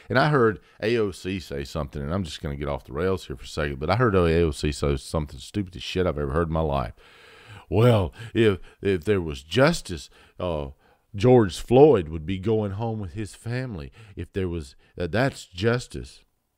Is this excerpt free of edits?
yes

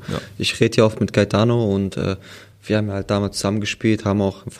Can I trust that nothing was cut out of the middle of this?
yes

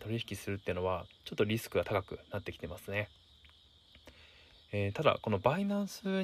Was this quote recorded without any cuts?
yes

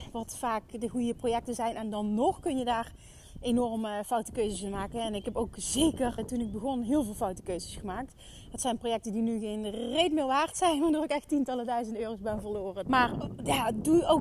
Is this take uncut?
no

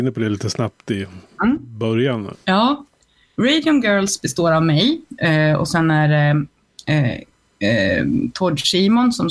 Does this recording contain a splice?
yes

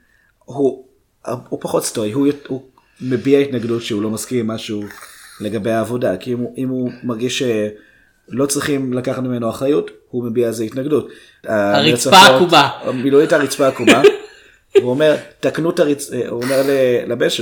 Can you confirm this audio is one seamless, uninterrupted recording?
no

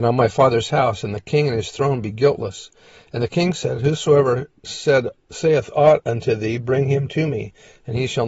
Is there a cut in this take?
no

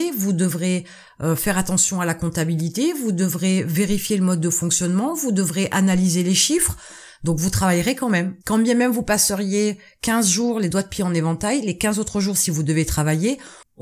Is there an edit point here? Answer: yes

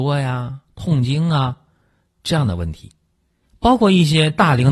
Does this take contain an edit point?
no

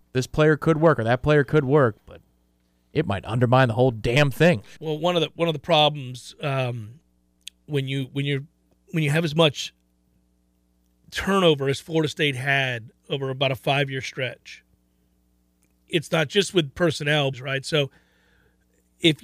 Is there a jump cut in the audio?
yes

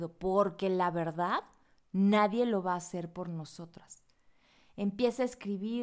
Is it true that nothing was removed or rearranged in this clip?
yes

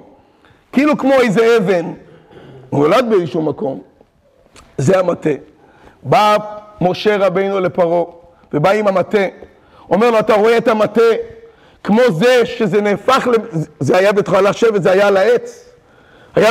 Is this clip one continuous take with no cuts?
yes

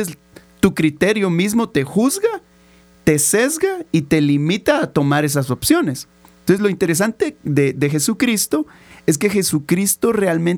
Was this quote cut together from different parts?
no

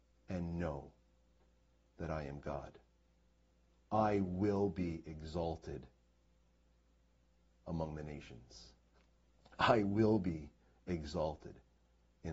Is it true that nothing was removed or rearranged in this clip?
yes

